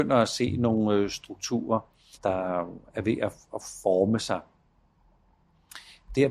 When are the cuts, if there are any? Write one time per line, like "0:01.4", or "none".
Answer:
0:02.1